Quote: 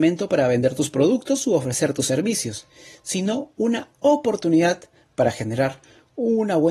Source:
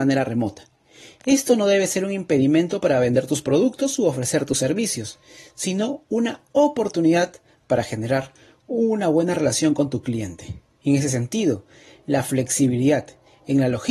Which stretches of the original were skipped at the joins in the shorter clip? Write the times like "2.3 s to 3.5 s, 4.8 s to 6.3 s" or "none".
none